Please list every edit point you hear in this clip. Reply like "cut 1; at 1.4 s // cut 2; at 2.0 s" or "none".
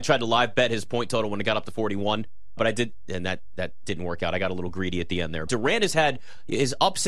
cut 1; at 2.6 s // cut 2; at 5.5 s